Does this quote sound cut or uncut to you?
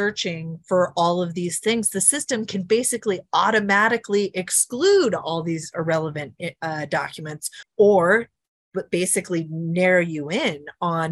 uncut